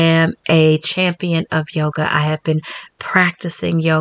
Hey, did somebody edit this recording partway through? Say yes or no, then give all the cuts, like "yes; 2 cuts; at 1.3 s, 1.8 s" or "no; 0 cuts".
no; 0 cuts